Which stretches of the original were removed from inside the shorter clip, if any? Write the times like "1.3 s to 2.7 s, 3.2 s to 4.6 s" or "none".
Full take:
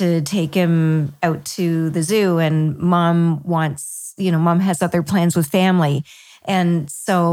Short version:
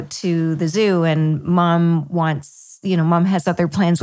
none